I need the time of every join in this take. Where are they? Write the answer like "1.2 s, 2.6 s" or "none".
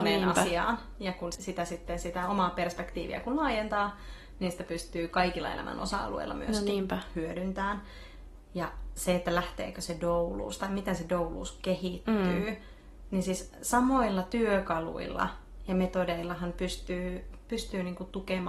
1.3 s